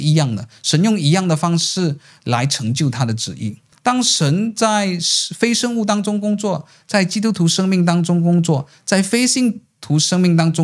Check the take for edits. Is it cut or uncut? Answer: cut